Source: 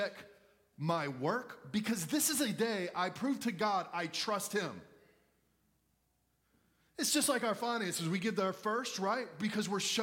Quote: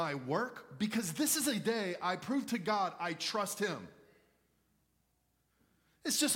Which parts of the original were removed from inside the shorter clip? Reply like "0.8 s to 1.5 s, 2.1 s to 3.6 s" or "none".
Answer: none